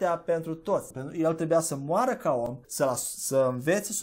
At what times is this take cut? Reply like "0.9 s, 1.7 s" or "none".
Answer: 0.9 s, 2.6 s